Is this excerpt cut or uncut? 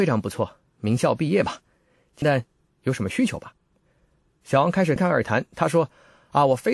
cut